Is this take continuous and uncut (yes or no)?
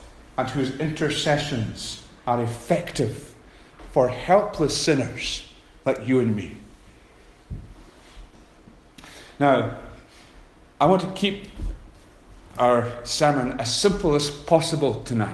yes